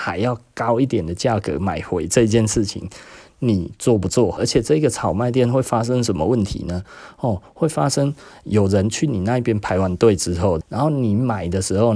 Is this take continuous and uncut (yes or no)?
no